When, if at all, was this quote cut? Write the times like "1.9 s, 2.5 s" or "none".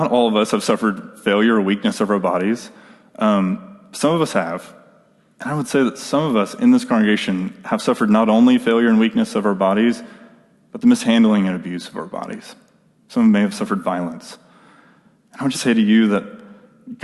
15.5 s